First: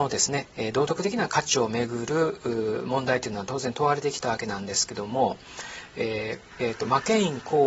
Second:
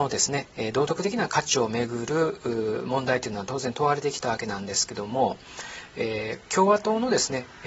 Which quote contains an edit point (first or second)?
first